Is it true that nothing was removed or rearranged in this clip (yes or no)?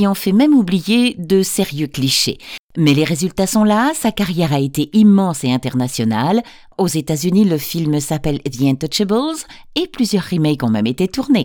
yes